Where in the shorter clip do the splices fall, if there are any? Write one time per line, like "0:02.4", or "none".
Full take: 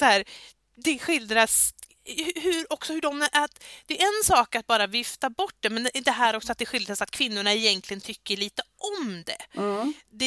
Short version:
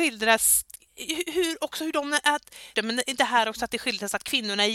0:02.7